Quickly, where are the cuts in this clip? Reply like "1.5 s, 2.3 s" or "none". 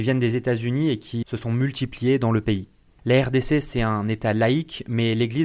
1.2 s, 3.0 s